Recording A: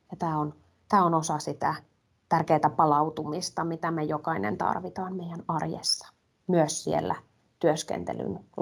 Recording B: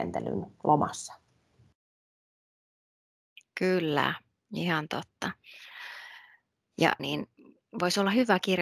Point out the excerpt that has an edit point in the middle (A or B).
B